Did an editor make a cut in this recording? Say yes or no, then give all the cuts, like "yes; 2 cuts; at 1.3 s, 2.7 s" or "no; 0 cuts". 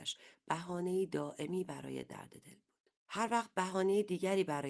yes; 1 cut; at 3.0 s